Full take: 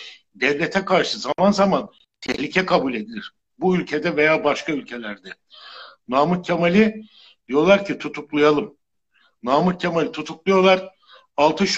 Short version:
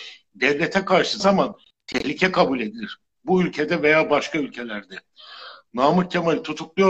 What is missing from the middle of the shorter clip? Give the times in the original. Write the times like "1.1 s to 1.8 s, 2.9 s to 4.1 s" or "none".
1.2 s to 1.5 s, 6.0 s to 9.4 s

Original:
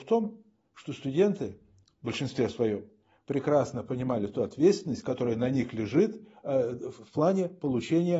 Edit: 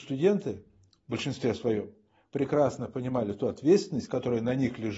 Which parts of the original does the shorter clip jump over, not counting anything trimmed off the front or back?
none

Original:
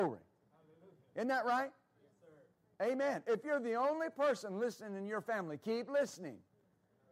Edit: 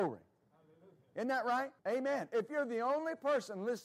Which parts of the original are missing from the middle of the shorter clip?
1.8 s to 2.7 s

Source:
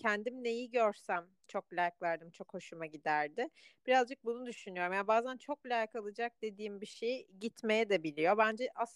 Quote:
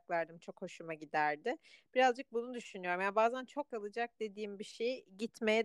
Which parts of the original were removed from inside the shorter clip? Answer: 5.6 s to 5.9 s

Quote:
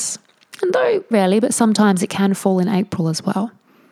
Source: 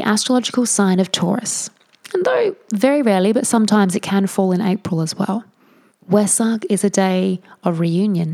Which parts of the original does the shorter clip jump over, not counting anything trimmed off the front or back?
2.6 s to 3.0 s

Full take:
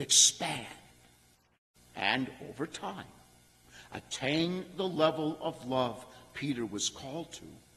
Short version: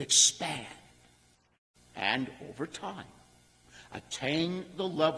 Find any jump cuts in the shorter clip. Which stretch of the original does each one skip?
none

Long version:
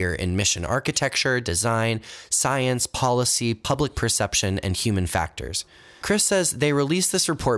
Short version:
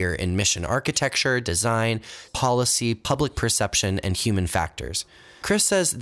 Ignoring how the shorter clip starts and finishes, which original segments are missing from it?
2.3 s to 2.9 s

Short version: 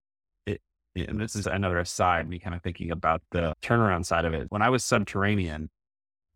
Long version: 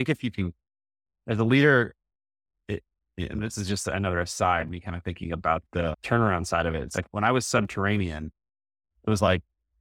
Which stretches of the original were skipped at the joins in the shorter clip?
3.7 s to 3.8 s, 6.9 s to 7.1 s

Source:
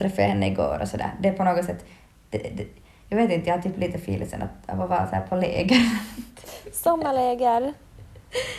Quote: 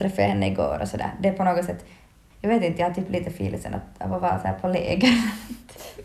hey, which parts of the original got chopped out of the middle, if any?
2.3 s to 3.0 s

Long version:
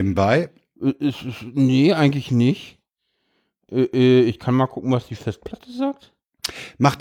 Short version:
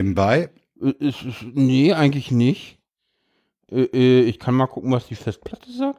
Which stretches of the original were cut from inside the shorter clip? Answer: none

